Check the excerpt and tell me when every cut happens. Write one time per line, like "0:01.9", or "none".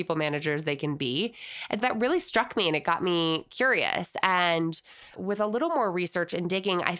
0:01.8